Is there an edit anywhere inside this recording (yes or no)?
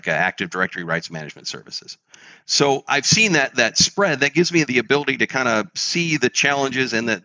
no